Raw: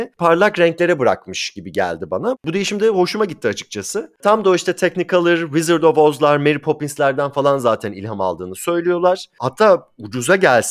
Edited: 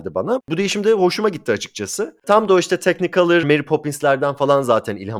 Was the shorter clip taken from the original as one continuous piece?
no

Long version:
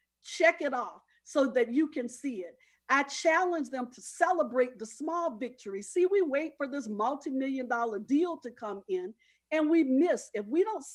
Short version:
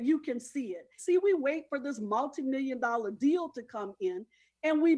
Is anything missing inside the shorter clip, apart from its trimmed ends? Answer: yes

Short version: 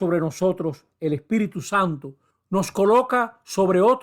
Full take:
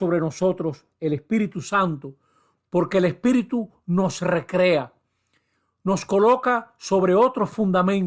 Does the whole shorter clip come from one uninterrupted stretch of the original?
no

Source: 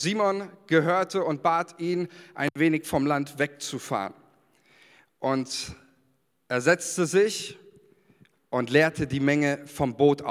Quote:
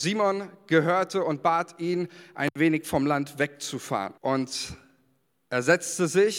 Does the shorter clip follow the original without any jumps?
no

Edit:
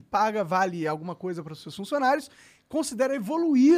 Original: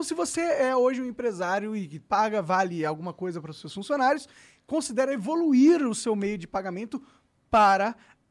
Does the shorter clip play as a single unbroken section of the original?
yes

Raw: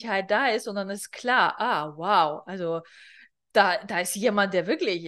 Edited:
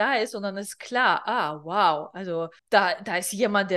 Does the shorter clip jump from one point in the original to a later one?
yes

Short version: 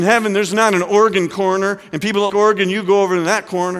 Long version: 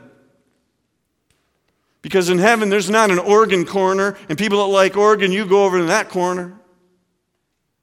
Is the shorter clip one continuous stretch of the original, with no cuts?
no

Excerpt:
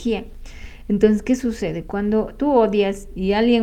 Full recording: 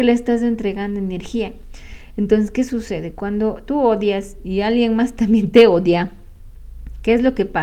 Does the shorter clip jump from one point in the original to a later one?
no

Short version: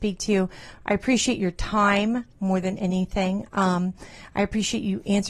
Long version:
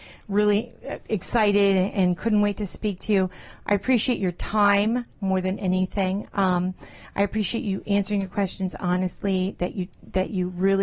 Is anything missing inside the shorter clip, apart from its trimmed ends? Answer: no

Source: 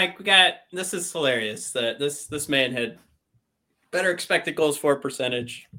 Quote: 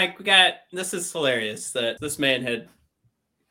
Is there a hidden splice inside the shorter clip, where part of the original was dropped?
yes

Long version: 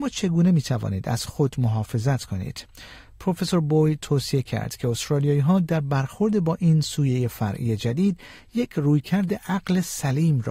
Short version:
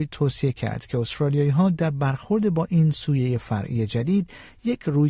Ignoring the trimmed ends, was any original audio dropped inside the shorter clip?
no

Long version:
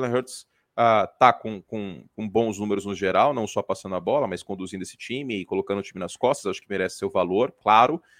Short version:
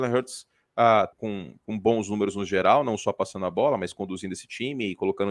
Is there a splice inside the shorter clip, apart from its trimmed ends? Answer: yes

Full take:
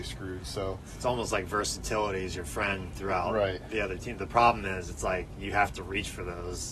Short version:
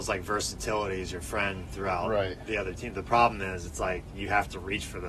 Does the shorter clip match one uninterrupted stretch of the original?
yes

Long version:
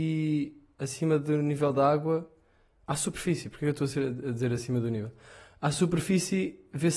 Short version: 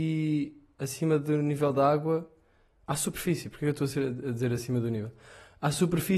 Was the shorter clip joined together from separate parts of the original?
no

